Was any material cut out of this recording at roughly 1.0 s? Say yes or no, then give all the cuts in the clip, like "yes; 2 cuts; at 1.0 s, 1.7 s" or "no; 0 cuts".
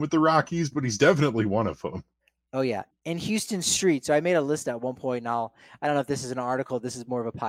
no; 1 cut; at 2.9 s